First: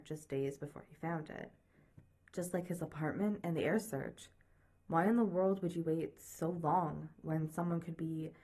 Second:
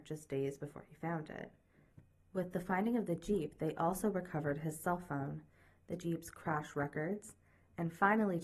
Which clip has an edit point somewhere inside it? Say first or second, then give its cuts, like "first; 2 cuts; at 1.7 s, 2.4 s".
first; 1 cut; at 2.2 s